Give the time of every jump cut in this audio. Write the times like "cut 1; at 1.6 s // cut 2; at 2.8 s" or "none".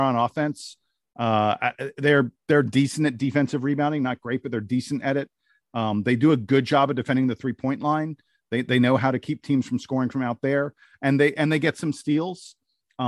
none